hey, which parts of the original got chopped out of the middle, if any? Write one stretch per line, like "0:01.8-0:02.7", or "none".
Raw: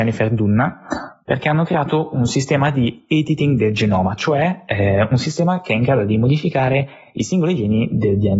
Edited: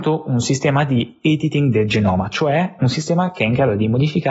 0:04.7-0:05.1